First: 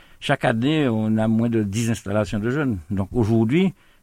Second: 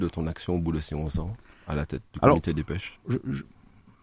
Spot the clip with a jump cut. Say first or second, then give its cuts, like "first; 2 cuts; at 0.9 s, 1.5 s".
second; 1 cut; at 3.0 s